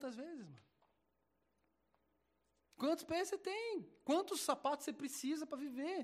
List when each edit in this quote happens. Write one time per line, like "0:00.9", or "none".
0:02.6